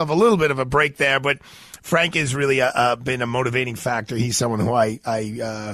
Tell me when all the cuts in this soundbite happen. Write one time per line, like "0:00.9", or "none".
none